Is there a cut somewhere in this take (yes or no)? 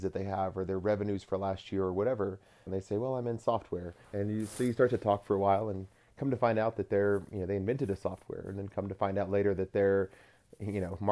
yes